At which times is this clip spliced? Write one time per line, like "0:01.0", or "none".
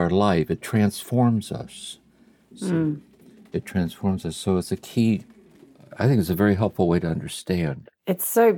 none